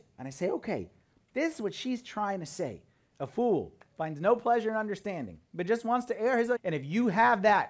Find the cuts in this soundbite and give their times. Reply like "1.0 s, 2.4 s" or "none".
3.1 s, 5.5 s, 6.6 s